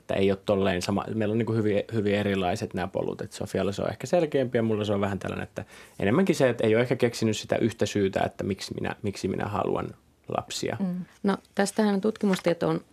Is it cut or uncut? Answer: cut